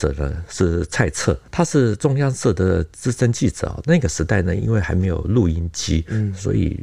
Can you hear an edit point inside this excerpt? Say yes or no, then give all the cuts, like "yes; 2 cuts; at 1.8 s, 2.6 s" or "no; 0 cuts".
no; 0 cuts